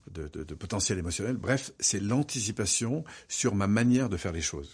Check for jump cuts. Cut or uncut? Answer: uncut